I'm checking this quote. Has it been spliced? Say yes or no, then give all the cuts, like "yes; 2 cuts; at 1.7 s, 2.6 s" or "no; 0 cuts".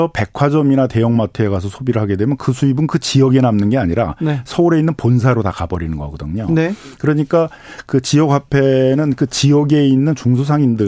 no; 0 cuts